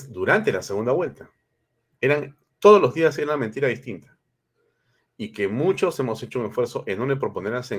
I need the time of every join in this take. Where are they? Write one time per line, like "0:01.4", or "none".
none